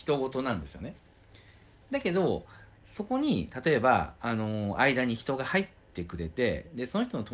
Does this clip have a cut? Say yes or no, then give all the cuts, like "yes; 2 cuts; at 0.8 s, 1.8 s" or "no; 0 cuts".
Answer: no; 0 cuts